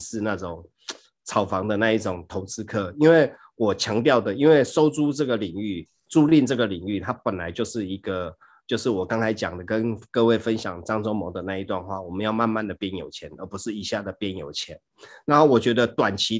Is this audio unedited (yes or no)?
yes